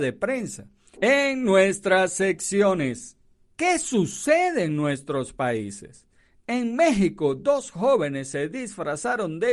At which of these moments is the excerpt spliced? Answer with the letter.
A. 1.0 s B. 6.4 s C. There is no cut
A